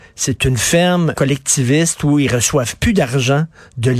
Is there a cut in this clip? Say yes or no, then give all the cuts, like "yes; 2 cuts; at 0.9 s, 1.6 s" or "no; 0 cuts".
yes; 1 cut; at 1.1 s